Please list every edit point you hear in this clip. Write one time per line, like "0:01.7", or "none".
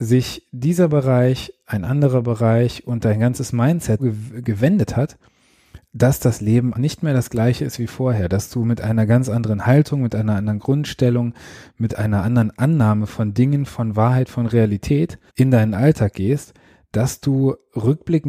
0:04.0
0:06.7
0:15.3

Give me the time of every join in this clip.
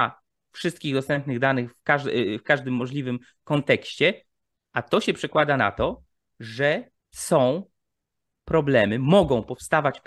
0:07.0

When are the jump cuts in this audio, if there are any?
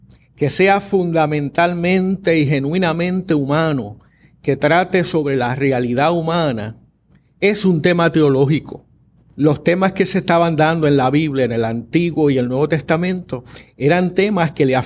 0:09.3

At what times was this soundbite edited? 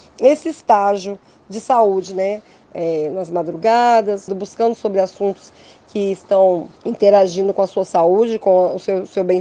0:02.6
0:04.3
0:06.8

